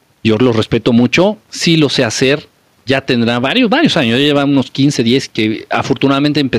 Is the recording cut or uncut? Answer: cut